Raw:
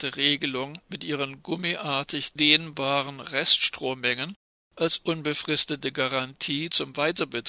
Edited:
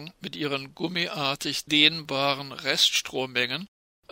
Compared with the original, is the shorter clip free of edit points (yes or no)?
yes